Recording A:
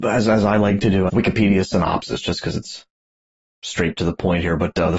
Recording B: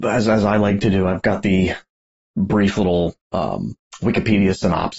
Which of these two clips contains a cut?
A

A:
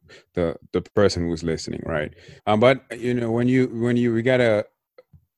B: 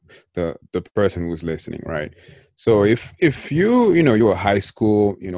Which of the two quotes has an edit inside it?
A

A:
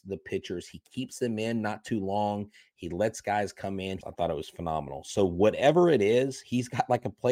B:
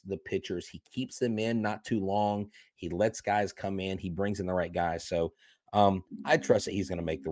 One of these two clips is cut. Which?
A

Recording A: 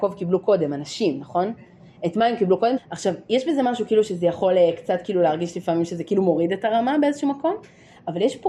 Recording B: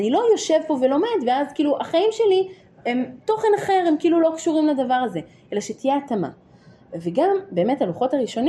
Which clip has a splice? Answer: A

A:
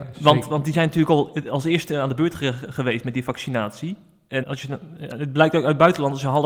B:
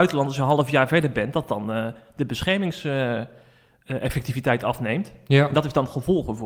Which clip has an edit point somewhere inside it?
A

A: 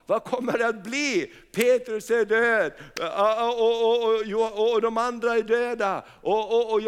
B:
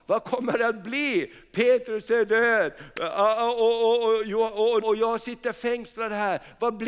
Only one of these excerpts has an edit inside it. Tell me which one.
B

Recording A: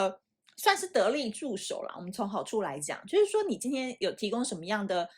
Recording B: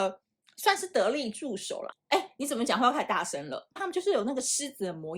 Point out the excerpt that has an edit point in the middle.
B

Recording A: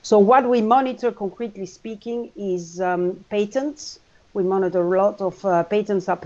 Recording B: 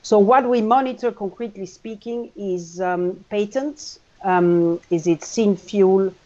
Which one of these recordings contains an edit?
B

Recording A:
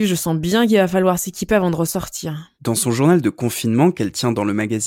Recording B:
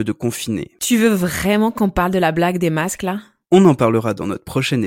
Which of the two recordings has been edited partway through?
A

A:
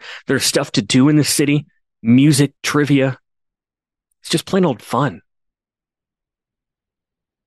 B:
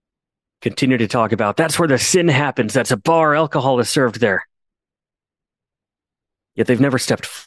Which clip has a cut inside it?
A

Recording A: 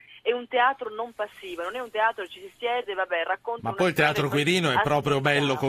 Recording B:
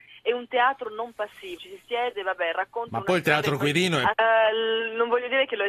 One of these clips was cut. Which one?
B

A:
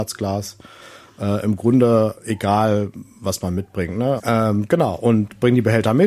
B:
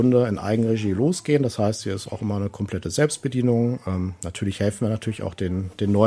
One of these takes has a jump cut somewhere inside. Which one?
A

